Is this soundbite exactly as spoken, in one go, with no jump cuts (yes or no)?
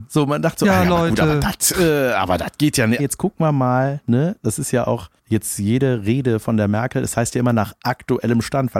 no